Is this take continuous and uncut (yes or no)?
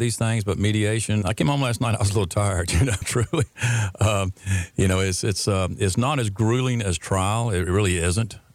no